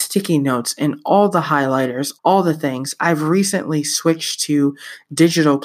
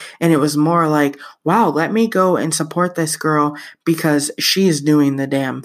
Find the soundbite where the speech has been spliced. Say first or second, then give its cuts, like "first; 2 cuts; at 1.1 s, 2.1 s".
first; 1 cut; at 2.2 s